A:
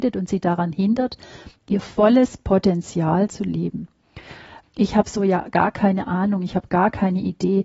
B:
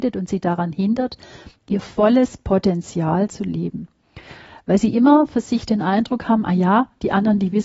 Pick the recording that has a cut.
A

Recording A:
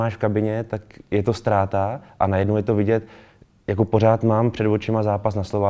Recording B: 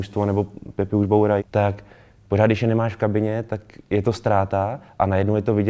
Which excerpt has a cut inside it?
B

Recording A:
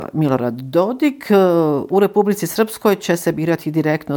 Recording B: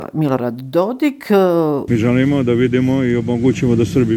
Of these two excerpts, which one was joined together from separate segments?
B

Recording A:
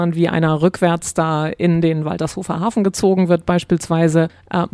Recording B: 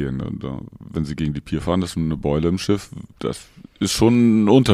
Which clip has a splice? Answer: B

